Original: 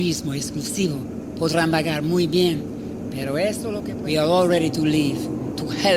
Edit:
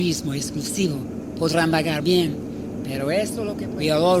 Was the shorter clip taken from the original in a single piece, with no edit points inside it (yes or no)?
no